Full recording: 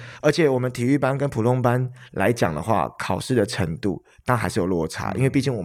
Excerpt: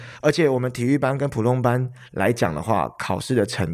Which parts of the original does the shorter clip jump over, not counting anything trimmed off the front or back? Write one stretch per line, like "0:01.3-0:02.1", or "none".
none